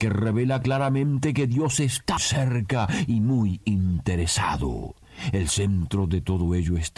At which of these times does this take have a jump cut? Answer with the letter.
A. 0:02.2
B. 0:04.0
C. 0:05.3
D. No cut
A